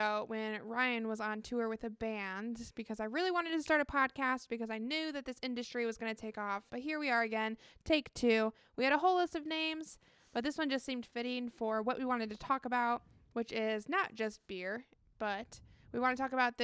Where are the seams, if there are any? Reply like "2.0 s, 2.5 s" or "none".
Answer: 6.7 s